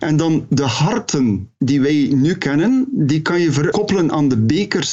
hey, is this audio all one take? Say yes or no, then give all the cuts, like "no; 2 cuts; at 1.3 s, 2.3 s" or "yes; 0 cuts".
no; 1 cut; at 3.7 s